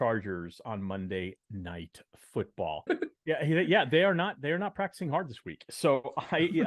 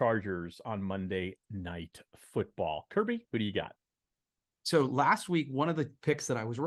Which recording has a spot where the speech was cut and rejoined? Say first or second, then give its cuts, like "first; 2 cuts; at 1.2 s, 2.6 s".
first; 1 cut; at 2.9 s